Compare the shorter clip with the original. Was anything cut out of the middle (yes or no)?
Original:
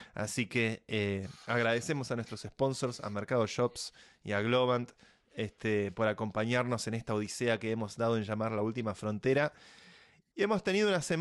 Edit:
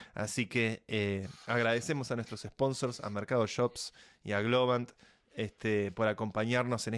no